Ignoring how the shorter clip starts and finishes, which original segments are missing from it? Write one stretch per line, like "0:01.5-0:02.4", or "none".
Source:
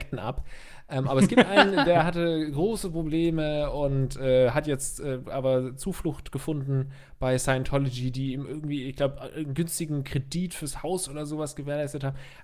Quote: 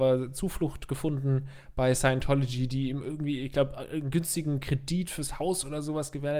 none

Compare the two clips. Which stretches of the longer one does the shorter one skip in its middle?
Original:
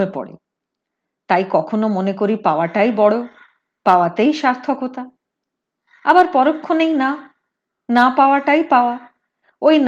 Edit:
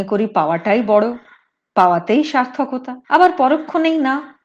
0:05.1-0:06.0

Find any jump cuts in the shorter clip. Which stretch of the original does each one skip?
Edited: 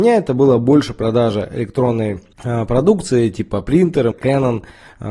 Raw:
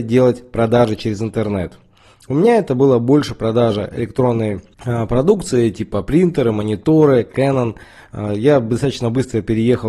0:06.5-0:07.2

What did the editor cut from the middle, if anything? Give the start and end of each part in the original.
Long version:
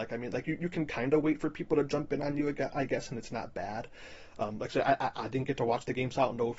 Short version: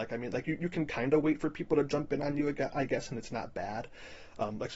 none

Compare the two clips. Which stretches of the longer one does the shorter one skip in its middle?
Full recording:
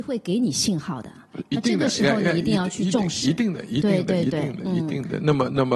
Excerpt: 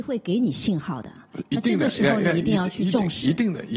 none

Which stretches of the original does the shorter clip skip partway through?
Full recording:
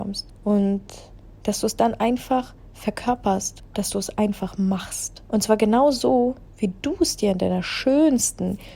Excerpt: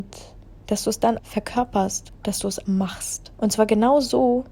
0:02.0-0:02.7
0:04.2-0:04.6

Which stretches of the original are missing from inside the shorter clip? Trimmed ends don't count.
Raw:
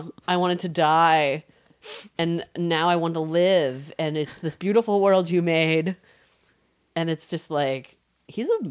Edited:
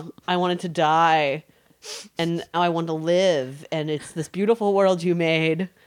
0:02.5-0:02.8

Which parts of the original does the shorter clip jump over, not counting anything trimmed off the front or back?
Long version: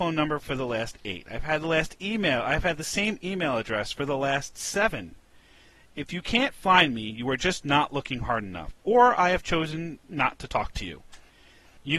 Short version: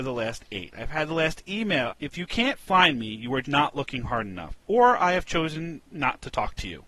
0:02.4-0:05.8
0:07.4-0:07.6

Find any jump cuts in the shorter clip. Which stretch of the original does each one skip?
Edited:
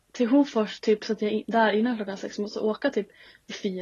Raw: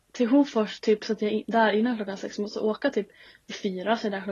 none

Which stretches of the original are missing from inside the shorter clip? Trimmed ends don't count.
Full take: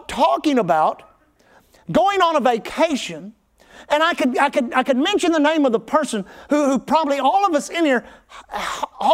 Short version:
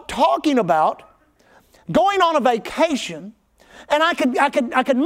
none

